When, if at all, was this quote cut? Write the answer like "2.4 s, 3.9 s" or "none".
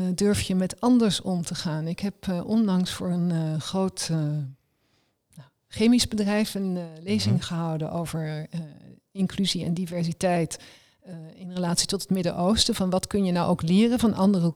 none